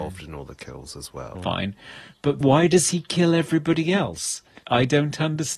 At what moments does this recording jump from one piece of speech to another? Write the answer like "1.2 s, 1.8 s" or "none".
1.3 s, 2.4 s